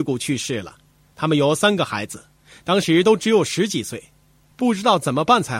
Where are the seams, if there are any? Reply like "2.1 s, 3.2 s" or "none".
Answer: 1.1 s, 4.5 s